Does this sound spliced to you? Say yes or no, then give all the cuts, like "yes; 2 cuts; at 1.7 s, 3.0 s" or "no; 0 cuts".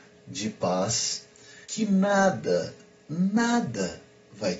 yes; 1 cut; at 1.6 s